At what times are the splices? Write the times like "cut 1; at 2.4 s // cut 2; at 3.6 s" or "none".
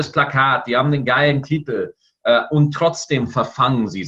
none